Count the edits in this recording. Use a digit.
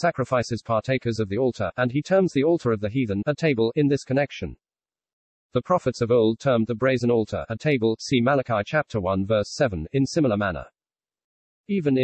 0